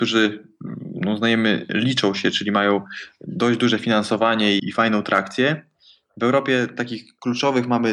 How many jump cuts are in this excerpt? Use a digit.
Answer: 1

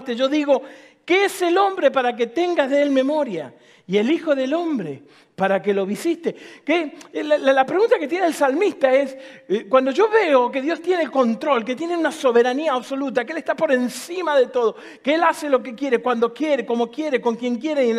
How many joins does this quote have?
0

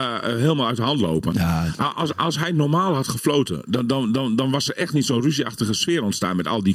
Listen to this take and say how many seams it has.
0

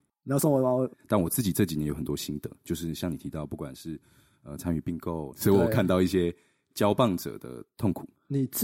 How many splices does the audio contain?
2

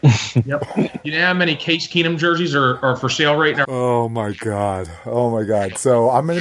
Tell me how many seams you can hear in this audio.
1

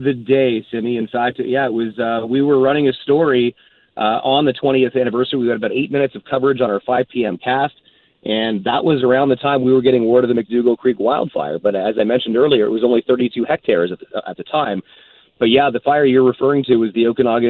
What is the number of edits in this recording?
0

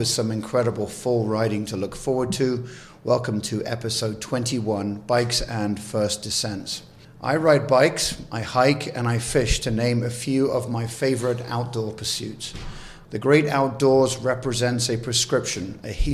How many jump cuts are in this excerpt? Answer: 1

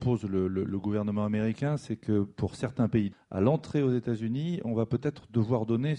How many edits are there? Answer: 1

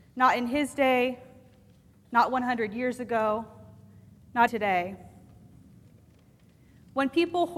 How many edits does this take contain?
1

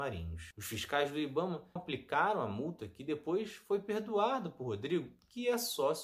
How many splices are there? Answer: 1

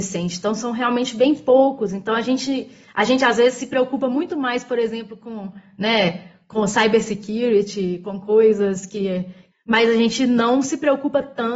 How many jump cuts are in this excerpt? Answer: 1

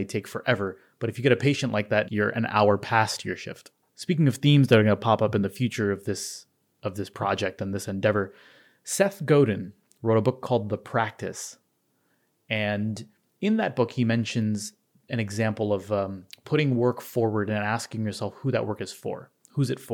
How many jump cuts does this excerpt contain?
2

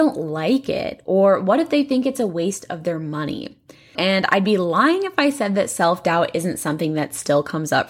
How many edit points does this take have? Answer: 1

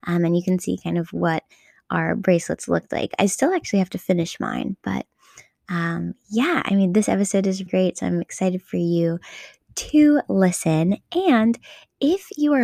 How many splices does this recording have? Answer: 1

